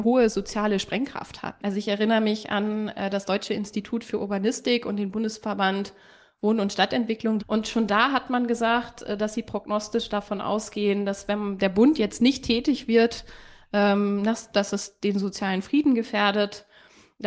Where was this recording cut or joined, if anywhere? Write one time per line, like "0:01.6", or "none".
0:01.6
0:07.4